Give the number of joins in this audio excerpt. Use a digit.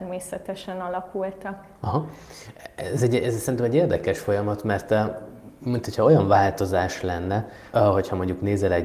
1